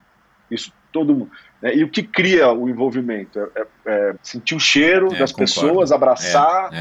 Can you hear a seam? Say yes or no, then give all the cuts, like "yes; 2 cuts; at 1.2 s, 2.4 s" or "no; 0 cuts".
yes; 1 cut; at 4.2 s